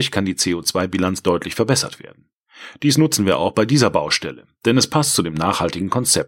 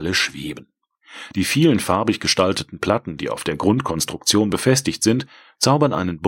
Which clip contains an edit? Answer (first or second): second